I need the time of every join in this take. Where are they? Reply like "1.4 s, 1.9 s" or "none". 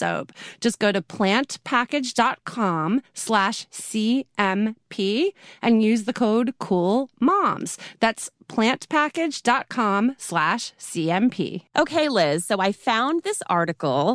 11.7 s